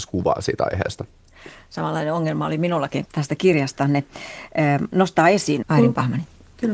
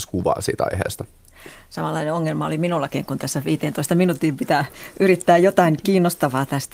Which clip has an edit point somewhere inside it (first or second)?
first